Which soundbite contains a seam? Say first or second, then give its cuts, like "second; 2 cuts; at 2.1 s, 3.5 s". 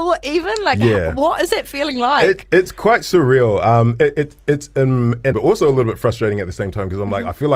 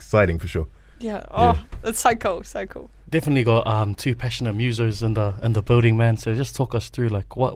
first; 1 cut; at 5.3 s